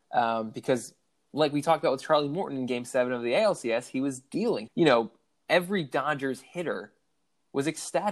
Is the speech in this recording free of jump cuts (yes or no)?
no